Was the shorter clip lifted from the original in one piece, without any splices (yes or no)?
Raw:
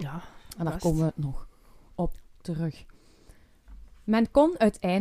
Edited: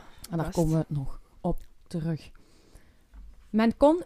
no